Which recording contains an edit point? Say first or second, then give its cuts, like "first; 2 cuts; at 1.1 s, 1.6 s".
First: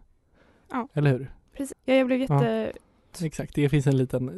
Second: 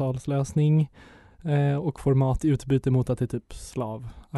first; 2 cuts; at 1.7 s, 3.1 s